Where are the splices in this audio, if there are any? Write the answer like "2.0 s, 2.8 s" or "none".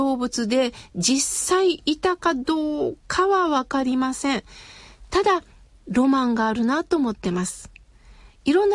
none